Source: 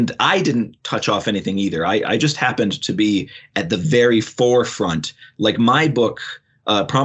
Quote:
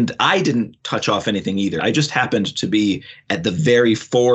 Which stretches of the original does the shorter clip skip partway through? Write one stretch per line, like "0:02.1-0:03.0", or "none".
0:01.8-0:02.0